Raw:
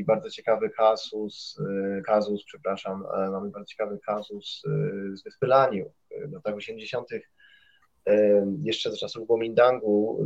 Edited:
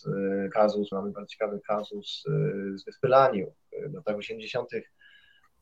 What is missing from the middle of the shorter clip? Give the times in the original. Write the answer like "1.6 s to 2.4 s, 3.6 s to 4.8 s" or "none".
2.4 s to 3.3 s